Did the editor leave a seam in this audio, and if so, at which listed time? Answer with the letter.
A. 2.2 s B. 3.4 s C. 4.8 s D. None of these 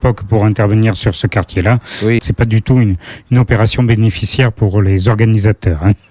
A